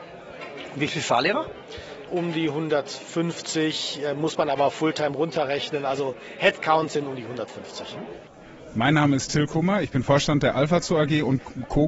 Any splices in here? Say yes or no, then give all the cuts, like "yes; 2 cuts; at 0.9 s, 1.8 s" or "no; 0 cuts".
no; 0 cuts